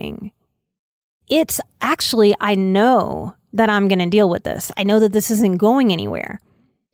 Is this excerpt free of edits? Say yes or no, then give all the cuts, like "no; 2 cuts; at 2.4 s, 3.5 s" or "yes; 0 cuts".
no; 2 cuts; at 1.2 s, 4.7 s